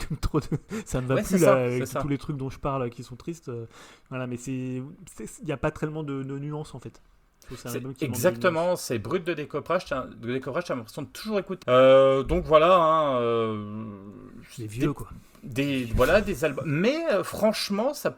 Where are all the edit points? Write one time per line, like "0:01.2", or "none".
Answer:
0:11.6